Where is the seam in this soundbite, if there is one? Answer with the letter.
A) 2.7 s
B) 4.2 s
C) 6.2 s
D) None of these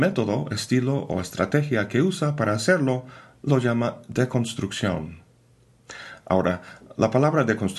D